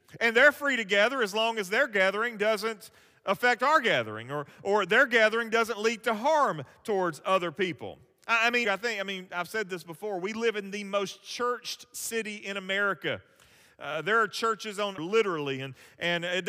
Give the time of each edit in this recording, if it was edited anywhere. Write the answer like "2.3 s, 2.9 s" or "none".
8.6 s, 15.0 s